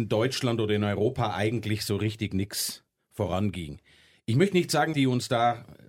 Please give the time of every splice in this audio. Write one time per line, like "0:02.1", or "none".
0:04.9